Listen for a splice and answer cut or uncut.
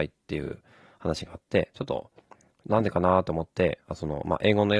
cut